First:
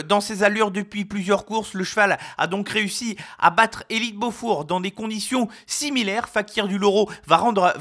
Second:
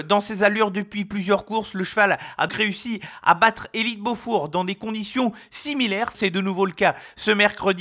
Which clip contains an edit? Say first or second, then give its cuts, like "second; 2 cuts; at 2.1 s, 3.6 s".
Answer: second; 2 cuts; at 2.5 s, 6.1 s